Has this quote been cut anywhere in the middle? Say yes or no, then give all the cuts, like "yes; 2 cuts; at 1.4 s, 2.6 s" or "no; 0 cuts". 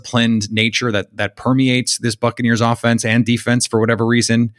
no; 0 cuts